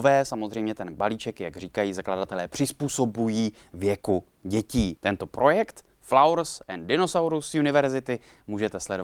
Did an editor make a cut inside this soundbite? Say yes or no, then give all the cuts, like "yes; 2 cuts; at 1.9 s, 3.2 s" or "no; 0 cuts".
no; 0 cuts